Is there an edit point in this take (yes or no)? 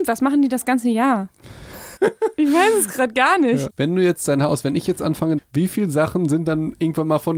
yes